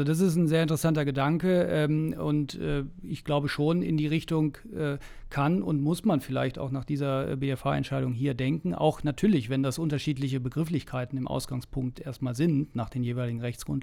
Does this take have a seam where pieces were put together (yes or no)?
no